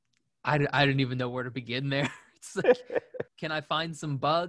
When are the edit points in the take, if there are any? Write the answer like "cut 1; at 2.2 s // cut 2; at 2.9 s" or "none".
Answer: cut 1; at 3.3 s